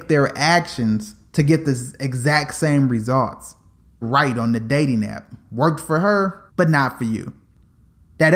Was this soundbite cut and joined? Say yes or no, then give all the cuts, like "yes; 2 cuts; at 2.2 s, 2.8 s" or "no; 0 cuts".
yes; 2 cuts; at 4.0 s, 6.5 s